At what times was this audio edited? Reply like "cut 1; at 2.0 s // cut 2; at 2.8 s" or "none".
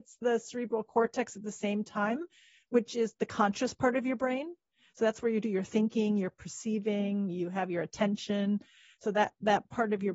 none